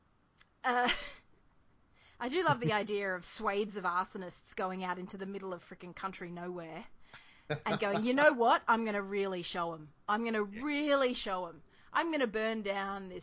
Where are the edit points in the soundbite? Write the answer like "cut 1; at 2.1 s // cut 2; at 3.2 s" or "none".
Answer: none